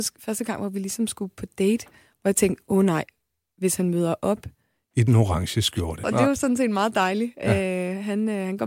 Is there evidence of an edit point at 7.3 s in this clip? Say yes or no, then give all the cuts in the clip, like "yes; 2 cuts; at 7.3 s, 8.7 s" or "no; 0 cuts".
no; 1 cut; at 6.0 s